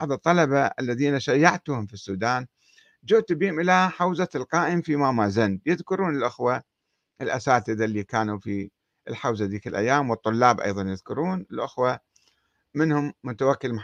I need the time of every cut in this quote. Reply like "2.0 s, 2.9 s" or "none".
none